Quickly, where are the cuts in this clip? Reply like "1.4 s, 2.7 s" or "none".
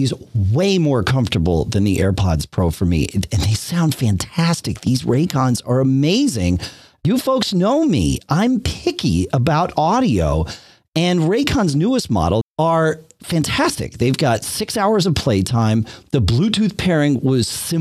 12.4 s